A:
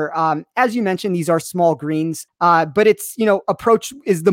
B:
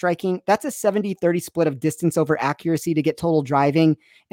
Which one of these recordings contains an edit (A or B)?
A